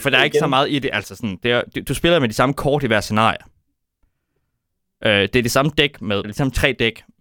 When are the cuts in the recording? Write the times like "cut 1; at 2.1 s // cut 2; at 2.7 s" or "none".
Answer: cut 1; at 6.2 s